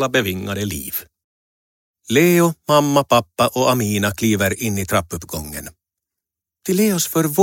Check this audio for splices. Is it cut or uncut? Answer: uncut